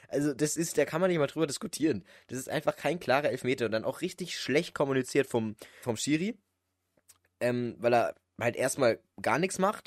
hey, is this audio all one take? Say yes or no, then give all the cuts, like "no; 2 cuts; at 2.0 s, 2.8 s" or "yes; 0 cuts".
no; 1 cut; at 5.8 s